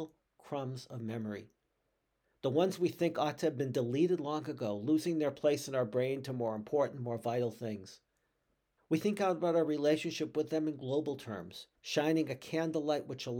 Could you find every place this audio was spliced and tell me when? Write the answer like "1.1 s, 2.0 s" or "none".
8.8 s, 11.8 s